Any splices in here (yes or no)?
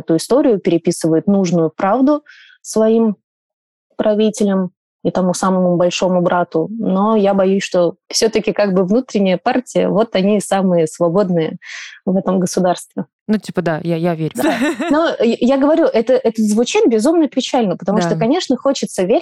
yes